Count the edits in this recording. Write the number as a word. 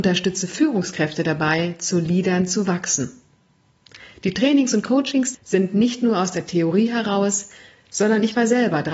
one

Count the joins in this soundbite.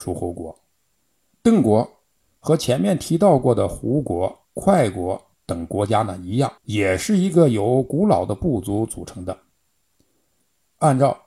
two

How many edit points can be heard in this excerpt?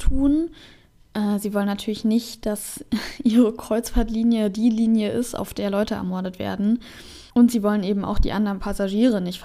one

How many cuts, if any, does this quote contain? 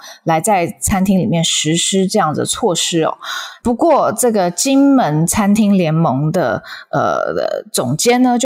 one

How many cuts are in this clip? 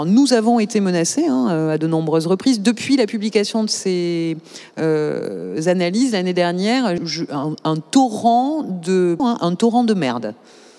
two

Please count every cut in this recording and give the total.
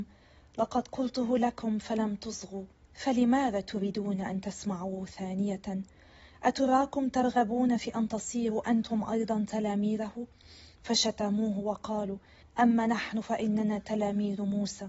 one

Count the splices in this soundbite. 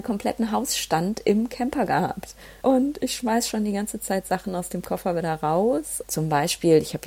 two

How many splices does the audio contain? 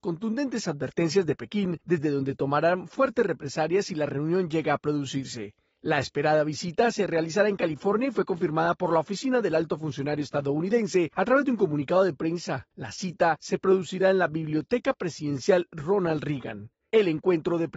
zero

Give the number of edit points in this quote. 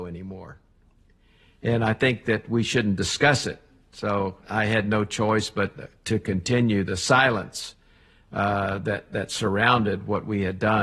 one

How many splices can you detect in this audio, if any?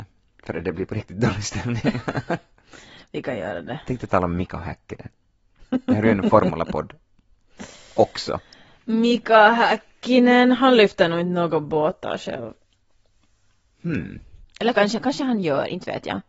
zero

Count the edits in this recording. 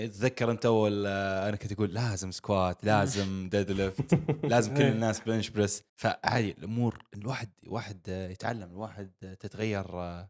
one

